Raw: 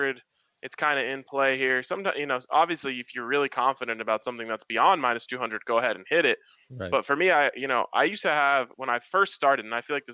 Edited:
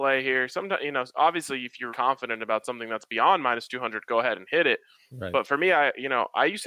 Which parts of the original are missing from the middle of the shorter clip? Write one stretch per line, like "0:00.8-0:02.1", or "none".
0:03.2-0:03.5